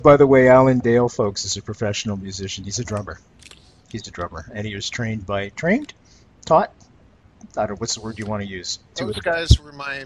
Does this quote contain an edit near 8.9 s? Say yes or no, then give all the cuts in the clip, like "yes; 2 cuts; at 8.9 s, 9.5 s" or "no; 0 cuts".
yes; 1 cut; at 8.9 s